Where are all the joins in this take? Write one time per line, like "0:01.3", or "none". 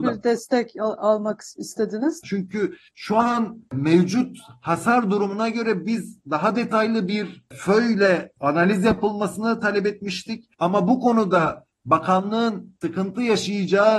0:02.2

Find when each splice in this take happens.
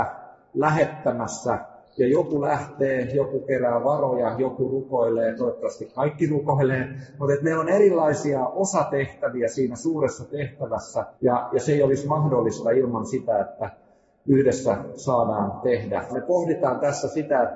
0:11.1
0:16.1

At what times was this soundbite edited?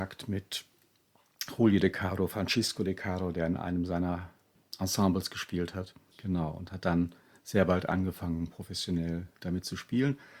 0:06.1

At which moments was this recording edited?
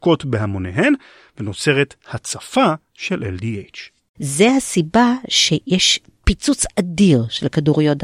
0:04.2

